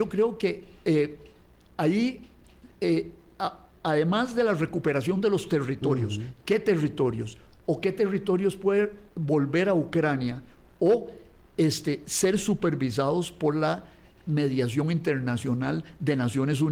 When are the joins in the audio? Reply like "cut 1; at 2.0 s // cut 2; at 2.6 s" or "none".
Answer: cut 1; at 3.8 s